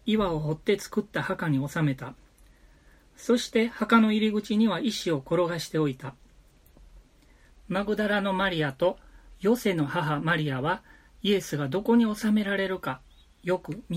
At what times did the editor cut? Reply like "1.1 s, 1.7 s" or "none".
none

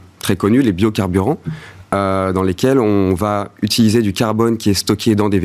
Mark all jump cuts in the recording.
none

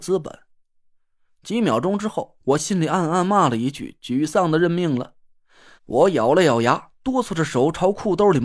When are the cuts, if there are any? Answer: 5.8 s

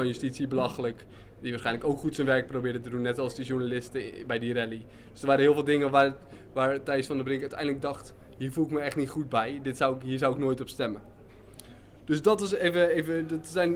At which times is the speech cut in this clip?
none

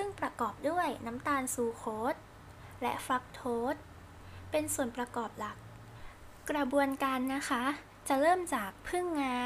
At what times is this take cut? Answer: none

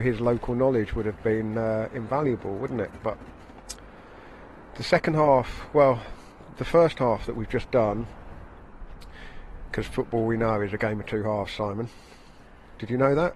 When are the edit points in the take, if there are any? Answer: none

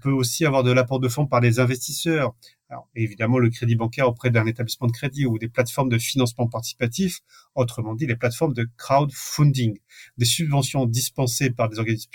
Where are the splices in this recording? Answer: none

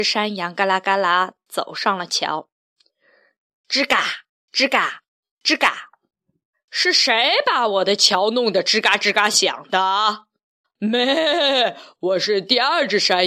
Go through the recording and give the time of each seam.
6.5 s, 10.6 s

